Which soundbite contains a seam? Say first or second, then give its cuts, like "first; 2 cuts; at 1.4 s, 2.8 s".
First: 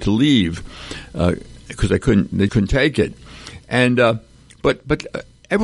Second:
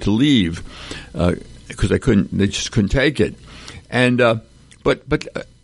first; 1 cut; at 2.5 s